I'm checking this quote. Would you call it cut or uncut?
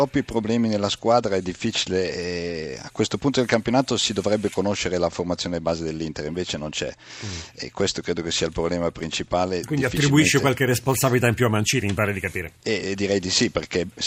cut